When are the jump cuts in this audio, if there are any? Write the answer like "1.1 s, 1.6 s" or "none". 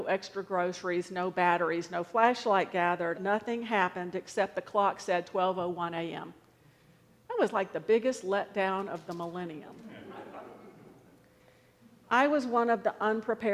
3.1 s